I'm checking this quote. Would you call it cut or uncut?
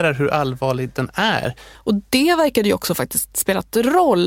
cut